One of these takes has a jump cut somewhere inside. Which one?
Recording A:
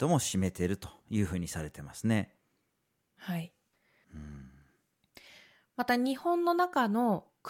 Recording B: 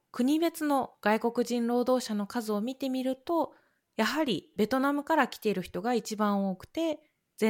A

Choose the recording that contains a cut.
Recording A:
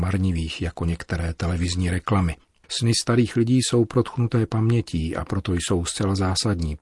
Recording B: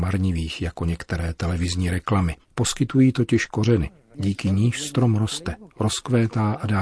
B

